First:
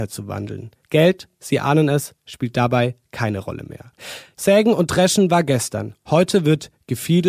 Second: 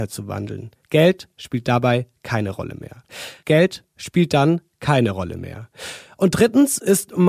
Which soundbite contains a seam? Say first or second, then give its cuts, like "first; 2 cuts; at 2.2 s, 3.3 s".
second; 2 cuts; at 1.3 s, 3.4 s